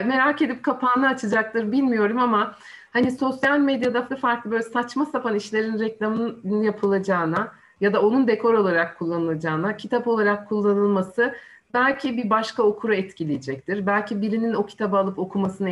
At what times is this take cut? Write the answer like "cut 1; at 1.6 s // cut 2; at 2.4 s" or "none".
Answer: cut 1; at 4.1 s